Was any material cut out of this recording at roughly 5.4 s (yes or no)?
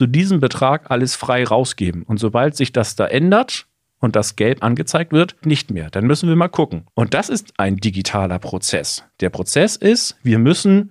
yes